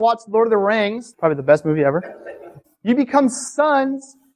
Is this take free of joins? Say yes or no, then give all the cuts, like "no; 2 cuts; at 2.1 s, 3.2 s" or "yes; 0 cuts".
no; 2 cuts; at 1.1 s, 2.6 s